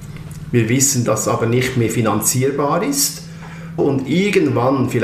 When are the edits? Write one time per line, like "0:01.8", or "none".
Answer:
0:01.1
0:03.8